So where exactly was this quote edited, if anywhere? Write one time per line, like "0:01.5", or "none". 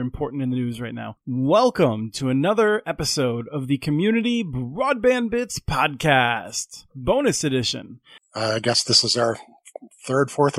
0:01.2
0:08.2